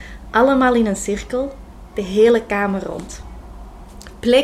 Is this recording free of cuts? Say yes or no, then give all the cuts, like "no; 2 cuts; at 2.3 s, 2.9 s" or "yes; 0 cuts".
yes; 0 cuts